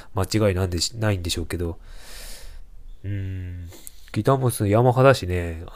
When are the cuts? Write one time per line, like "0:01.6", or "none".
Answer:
none